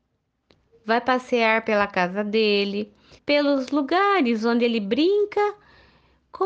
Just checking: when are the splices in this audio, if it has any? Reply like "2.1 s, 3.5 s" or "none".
3.2 s